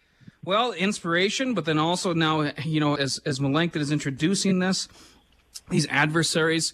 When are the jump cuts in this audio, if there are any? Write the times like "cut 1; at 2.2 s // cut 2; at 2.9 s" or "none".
cut 1; at 3.0 s